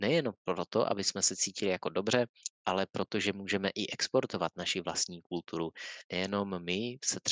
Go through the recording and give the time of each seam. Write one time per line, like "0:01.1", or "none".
none